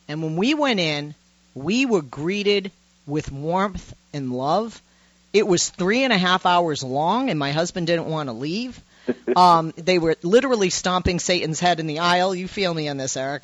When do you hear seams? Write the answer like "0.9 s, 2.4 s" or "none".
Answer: none